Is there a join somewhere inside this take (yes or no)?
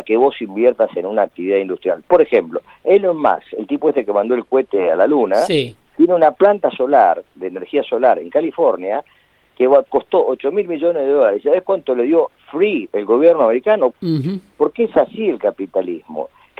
yes